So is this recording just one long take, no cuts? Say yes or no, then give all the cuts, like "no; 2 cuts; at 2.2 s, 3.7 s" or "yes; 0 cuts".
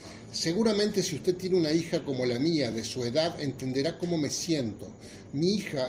yes; 0 cuts